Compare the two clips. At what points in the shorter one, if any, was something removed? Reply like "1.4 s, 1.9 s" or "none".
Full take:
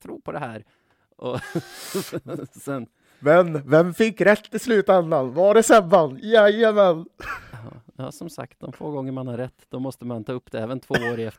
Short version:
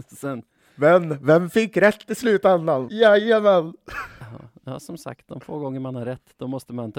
2.9 s